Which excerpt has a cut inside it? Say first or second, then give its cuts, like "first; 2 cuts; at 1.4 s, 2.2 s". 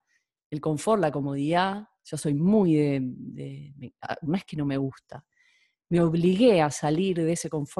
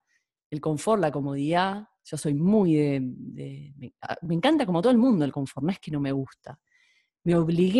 first; 1 cut; at 4.3 s